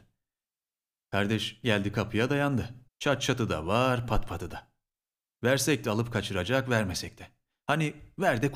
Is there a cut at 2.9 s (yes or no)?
yes